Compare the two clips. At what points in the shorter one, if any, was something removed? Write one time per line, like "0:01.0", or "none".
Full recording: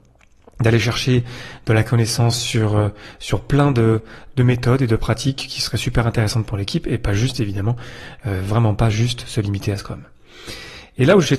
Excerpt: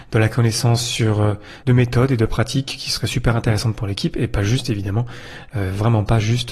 0:01.6